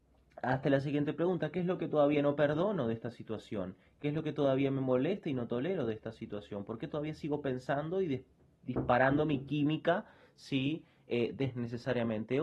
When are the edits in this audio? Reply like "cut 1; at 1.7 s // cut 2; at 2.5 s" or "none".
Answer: none